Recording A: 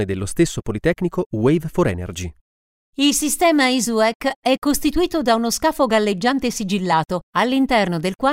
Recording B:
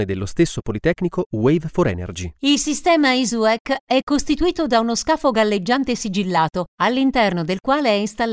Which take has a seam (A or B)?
B